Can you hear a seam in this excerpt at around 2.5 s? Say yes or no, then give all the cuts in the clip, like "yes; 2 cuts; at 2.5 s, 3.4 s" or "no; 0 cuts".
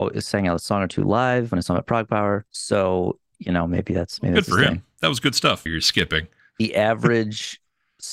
yes; 2 cuts; at 2.5 s, 5.7 s